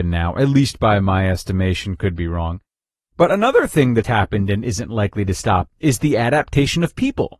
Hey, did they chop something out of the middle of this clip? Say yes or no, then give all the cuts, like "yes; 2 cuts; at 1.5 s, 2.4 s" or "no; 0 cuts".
yes; 2 cuts; at 4.0 s, 5.7 s